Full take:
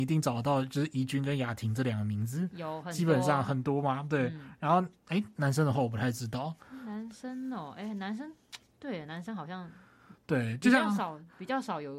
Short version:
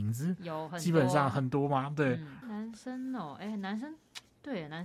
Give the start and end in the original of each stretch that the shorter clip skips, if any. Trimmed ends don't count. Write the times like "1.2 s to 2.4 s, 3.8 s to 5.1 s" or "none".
4.6 s to 6.8 s